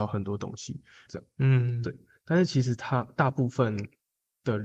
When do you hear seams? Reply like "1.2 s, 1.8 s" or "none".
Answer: 1.1 s